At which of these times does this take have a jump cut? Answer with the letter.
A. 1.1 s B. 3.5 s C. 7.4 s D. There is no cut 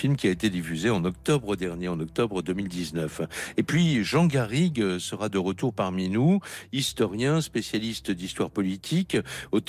D